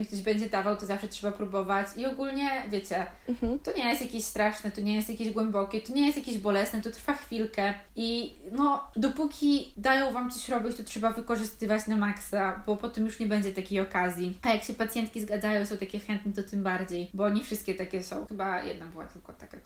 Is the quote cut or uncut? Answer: cut